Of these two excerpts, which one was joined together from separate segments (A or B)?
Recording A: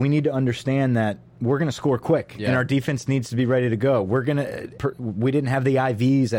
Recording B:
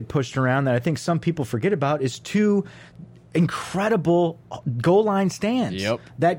A